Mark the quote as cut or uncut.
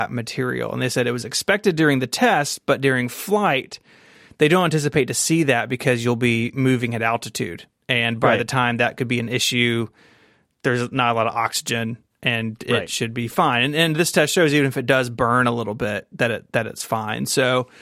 uncut